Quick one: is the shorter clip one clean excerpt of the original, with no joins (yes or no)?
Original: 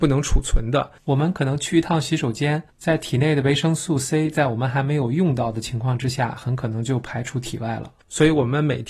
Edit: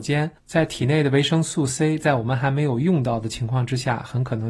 yes